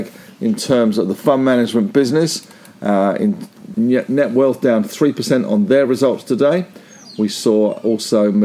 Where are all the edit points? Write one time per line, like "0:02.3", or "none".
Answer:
0:03.7

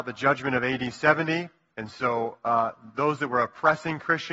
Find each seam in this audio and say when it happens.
none

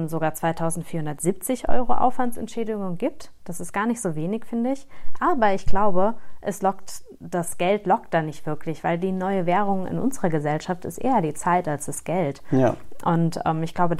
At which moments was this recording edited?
none

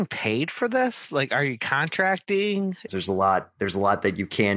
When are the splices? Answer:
0:02.9

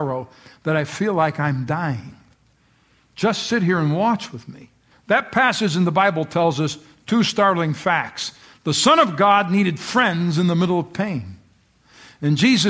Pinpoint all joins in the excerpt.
0:04.9

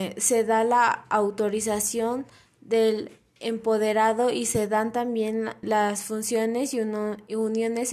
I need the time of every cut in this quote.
0:05.6

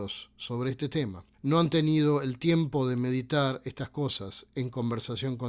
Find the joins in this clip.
0:01.3

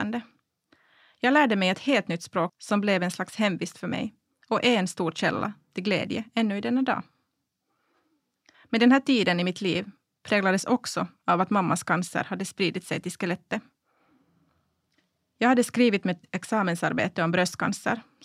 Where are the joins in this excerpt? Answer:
0:02.5
0:08.5

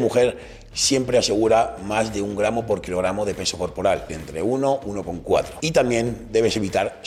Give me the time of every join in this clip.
0:04.1

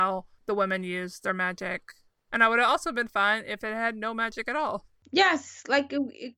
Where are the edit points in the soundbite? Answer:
none

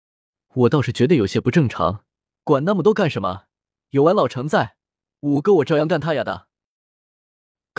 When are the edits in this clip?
0:02.4

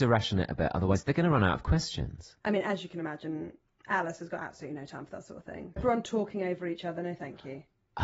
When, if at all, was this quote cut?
0:02.4
0:05.8

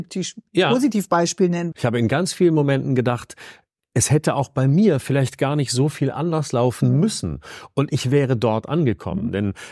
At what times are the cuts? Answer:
0:01.7

